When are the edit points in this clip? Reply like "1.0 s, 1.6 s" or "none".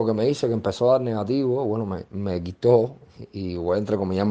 none